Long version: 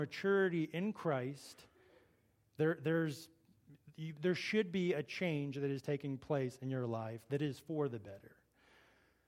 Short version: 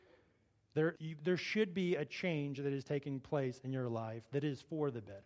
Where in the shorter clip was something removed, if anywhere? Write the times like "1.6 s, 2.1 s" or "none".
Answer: 0.9 s